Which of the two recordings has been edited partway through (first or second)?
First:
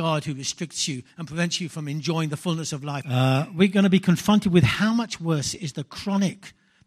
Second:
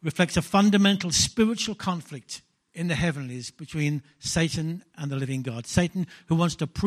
first